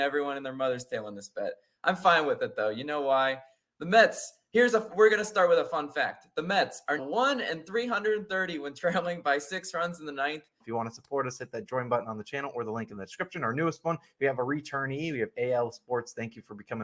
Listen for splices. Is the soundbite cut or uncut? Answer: cut